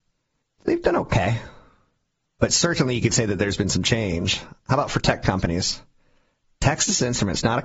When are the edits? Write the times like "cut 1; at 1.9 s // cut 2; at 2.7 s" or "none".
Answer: none

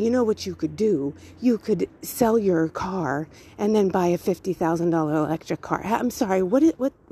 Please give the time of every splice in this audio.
none

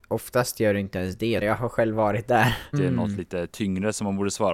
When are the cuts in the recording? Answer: cut 1; at 1.4 s // cut 2; at 2.7 s

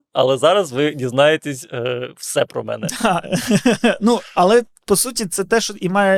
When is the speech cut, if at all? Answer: none

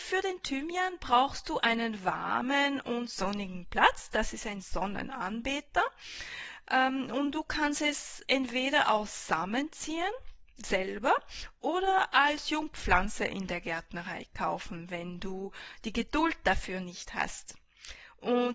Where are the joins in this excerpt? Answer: none

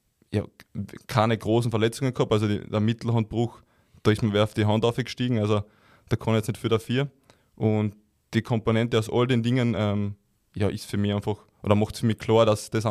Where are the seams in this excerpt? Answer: none

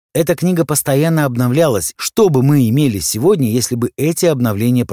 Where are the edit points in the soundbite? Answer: cut 1; at 2.0 s

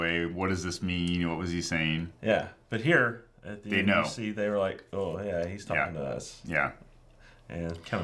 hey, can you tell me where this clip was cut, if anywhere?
none

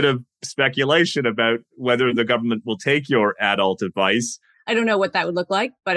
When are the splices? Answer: cut 1; at 4.5 s

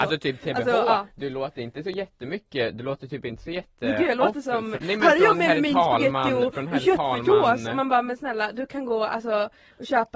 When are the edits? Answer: cut 1; at 4.8 s

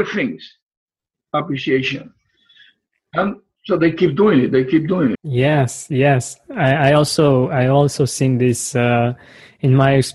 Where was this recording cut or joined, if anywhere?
cut 1; at 5.1 s

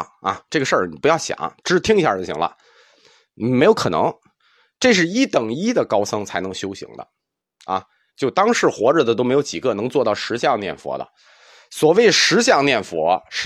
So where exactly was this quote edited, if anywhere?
cut 1; at 8.1 s

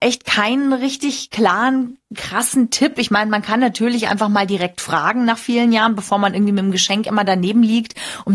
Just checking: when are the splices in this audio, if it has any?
none

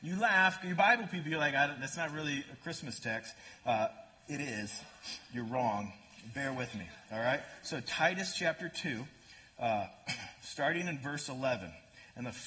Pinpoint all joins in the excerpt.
none

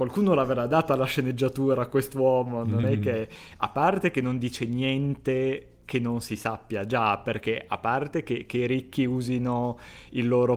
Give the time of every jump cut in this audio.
none

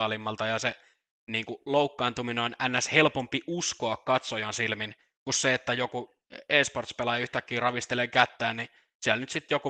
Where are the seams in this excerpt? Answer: none

